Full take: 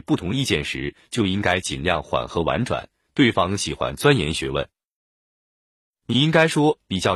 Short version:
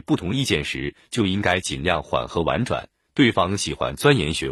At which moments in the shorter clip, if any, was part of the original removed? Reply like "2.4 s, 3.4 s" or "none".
none